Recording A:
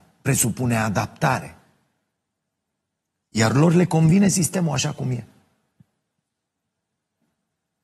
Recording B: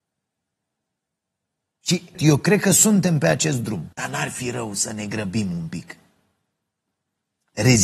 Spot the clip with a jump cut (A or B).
B